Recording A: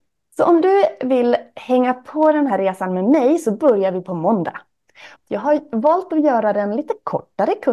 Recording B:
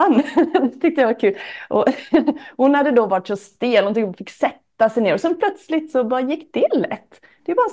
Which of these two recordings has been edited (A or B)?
A